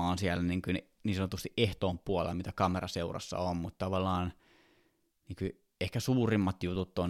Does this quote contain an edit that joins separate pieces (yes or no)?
no